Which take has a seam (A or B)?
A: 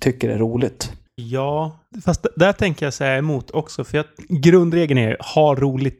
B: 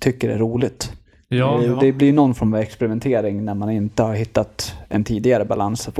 A